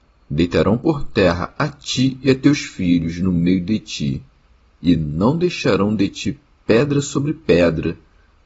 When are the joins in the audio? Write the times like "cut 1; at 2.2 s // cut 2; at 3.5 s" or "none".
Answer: none

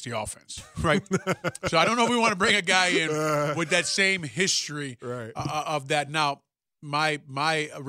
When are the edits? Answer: none

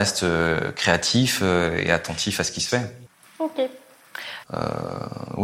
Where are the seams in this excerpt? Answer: cut 1; at 4.4 s

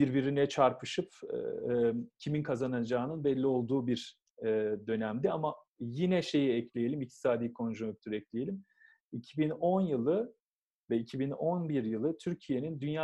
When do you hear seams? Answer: none

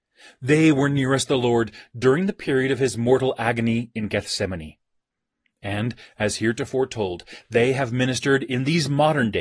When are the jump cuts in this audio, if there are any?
none

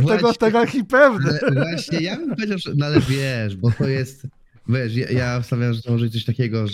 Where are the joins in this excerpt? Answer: none

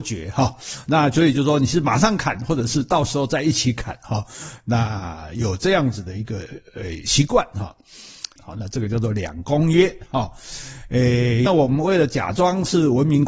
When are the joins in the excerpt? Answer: cut 1; at 8.4 s // cut 2; at 11.5 s

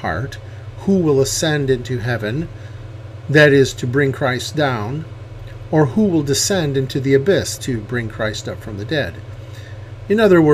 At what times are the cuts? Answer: cut 1; at 7.6 s

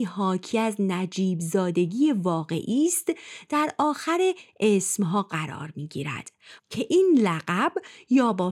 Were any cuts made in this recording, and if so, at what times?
cut 1; at 6.6 s

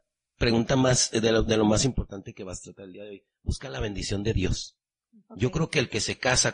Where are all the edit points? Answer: none

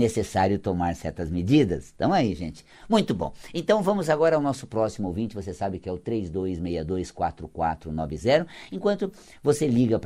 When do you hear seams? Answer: none

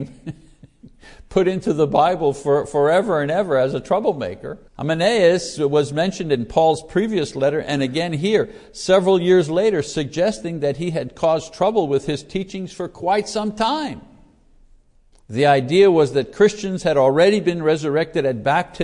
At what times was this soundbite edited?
cut 1; at 4.7 s // cut 2; at 15.1 s

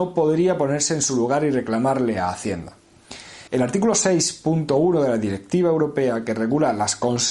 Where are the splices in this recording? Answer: cut 1; at 3.5 s

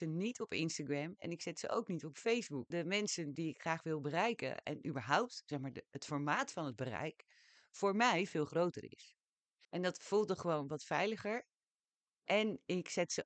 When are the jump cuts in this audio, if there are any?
cut 1; at 2.7 s // cut 2; at 9.6 s

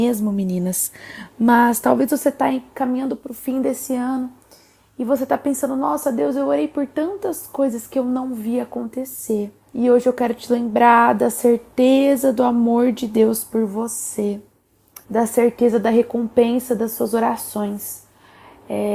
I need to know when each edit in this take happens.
cut 1; at 9.7 s // cut 2; at 15.0 s

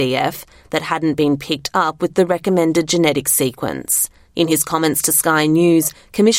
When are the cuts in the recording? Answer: cut 1; at 4.3 s

